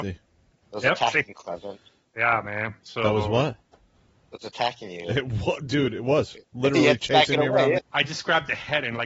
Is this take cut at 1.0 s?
no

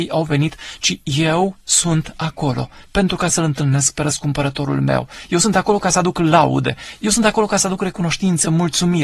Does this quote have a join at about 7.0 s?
no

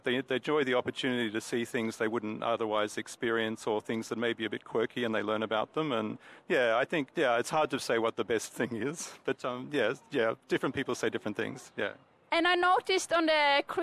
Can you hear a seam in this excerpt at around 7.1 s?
yes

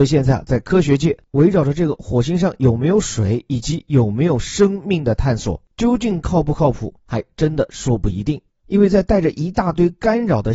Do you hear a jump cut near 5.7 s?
no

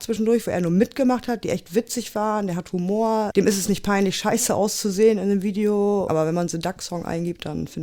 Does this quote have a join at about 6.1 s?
yes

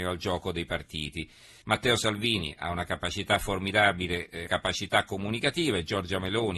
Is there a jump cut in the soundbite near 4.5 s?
yes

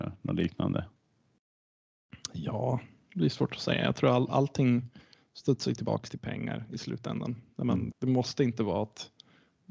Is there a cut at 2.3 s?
no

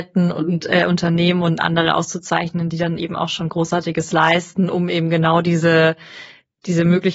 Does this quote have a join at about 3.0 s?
no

